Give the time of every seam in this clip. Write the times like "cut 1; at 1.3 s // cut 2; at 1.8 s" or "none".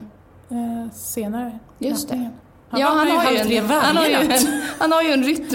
cut 1; at 2.7 s